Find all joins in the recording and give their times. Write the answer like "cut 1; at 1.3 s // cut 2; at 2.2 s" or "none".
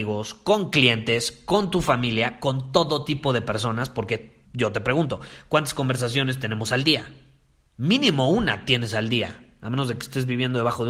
cut 1; at 4.5 s